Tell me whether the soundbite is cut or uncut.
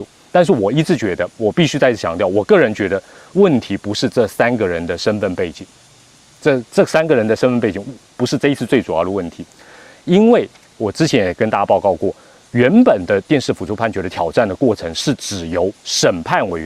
uncut